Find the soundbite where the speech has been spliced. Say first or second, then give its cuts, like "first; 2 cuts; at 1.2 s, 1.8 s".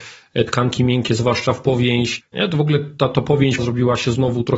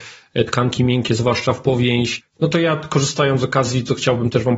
first; 2 cuts; at 2.3 s, 3.6 s